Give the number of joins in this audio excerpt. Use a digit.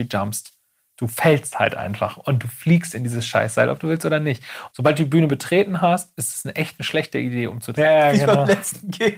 2